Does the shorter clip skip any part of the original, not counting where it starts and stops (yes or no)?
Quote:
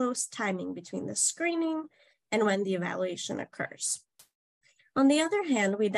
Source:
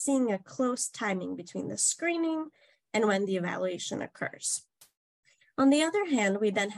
no